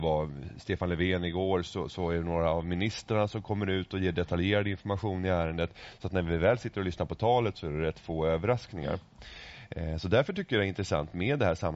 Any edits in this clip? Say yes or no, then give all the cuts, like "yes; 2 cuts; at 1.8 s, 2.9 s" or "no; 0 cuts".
no; 0 cuts